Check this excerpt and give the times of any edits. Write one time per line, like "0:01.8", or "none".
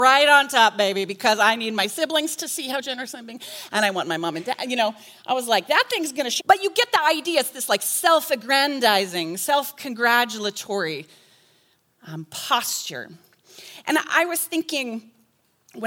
0:06.4